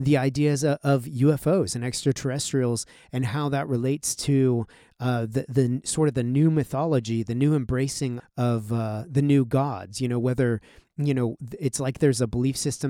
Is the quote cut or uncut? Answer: cut